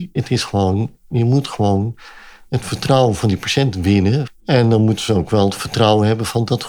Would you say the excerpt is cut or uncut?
cut